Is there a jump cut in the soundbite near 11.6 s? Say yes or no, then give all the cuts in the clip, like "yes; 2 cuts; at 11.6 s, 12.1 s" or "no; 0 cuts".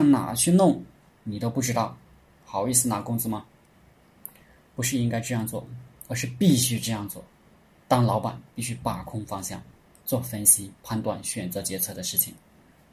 no; 0 cuts